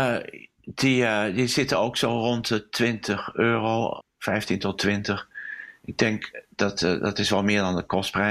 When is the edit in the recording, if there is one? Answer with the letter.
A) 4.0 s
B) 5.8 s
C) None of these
A